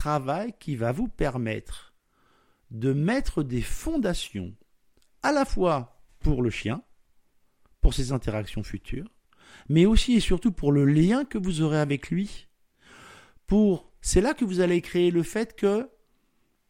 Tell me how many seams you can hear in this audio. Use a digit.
1